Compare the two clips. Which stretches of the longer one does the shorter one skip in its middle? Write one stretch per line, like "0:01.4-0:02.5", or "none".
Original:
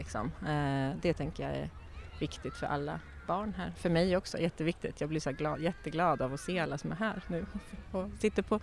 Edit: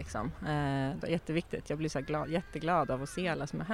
0:01.0-0:04.3